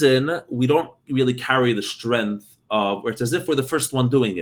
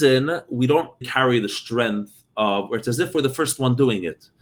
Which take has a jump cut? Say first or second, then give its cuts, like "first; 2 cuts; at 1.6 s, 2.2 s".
second; 1 cut; at 1.0 s